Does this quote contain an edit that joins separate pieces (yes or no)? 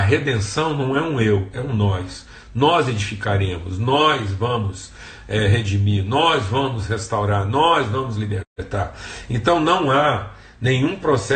yes